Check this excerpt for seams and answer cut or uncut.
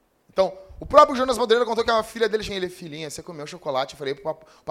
cut